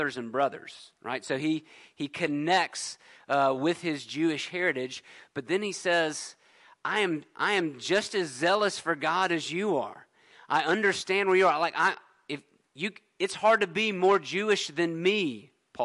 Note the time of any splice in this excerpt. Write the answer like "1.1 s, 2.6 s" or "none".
none